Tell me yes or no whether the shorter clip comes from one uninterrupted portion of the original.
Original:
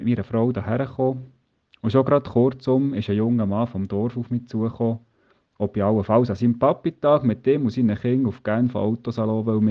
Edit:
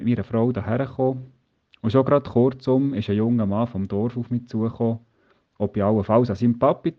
yes